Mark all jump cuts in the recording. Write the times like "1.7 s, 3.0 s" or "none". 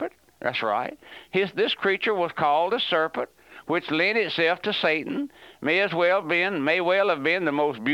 none

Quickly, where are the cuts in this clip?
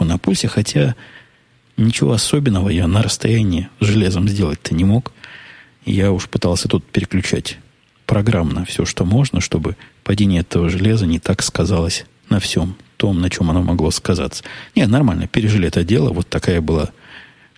none

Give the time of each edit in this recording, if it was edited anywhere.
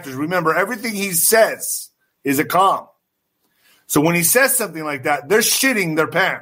none

